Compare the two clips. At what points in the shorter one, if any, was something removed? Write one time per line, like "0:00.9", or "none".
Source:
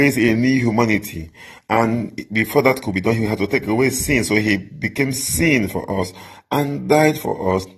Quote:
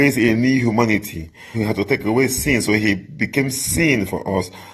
0:01.5

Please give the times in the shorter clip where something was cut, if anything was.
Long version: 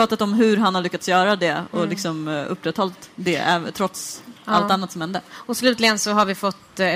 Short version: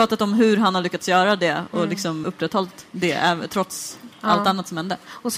0:02.2

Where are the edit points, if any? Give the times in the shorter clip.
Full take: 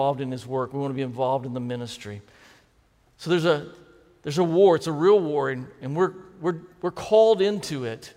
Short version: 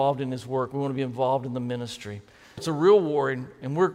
0:02.6

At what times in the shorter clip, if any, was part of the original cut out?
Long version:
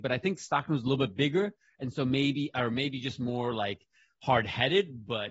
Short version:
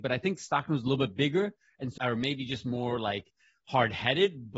0:02.0

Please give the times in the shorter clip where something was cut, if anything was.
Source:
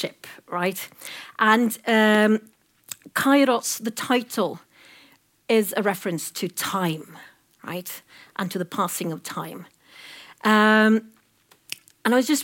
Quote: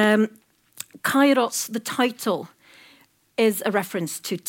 none

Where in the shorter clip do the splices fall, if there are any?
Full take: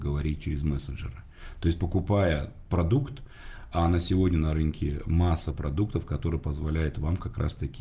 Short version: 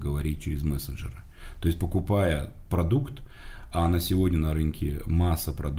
none

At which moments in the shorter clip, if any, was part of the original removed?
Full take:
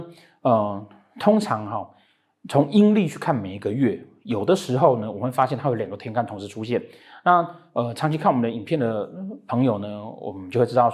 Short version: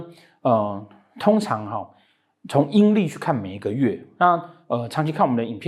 0:04.2

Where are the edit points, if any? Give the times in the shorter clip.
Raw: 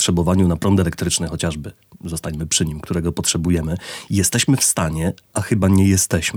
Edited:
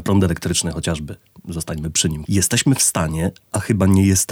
0:02.2

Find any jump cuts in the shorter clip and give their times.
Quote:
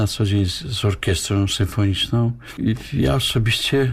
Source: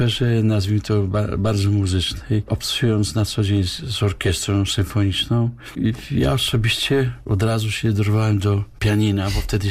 none

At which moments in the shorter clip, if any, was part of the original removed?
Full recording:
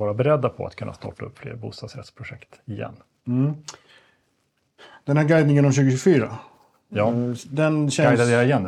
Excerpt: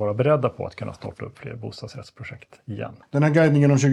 0:03.0

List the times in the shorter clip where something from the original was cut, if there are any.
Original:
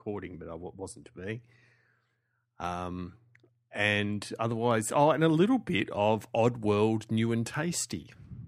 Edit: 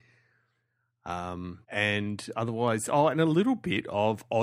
0:01.6

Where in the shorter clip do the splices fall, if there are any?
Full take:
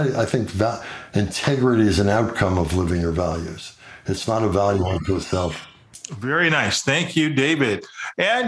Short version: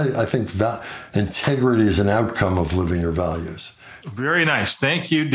0:04.0

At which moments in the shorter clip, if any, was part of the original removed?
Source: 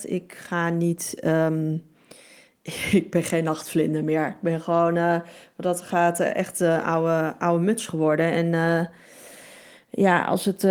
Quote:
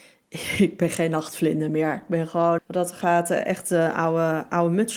0:02.6

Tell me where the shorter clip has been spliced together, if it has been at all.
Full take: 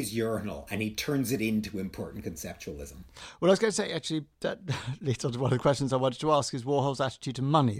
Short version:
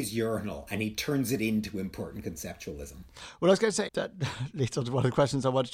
0:03.9

